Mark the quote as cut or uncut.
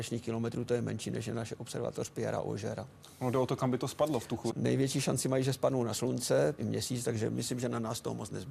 cut